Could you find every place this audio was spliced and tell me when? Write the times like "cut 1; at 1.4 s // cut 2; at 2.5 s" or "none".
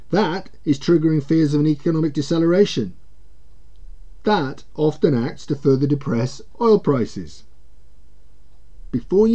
none

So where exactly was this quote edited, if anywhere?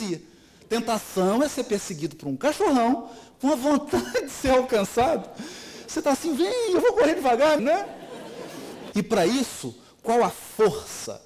cut 1; at 7.6 s // cut 2; at 8.9 s

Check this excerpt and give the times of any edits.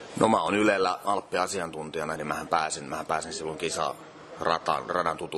cut 1; at 2.2 s

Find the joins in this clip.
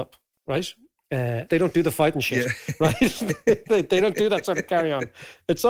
cut 1; at 1.5 s

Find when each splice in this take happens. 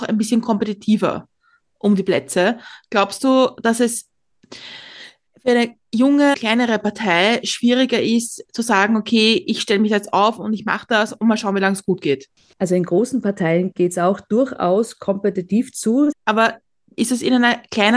cut 1; at 6.3 s // cut 2; at 16.1 s

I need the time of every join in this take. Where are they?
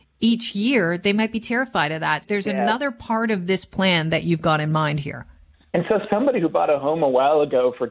cut 1; at 2.2 s // cut 2; at 5.7 s

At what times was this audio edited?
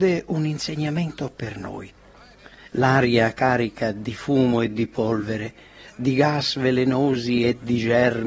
cut 1; at 2.7 s

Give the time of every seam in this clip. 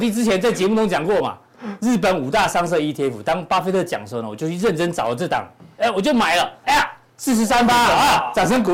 cut 1; at 6.6 s

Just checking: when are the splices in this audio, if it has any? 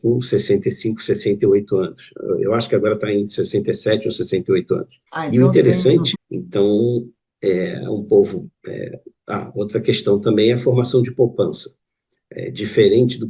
cut 1; at 5.1 s // cut 2; at 6.1 s

